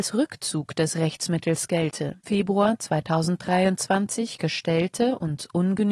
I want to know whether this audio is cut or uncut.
cut